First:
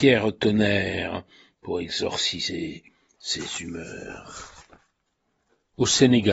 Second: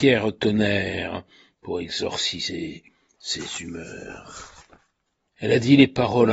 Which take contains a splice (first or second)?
second